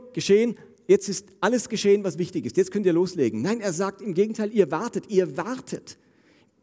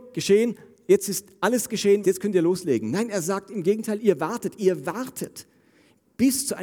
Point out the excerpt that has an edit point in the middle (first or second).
second